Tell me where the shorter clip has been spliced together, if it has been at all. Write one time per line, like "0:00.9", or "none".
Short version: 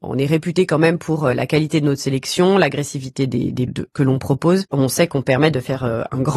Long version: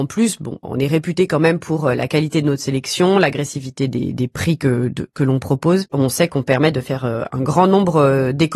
0:03.7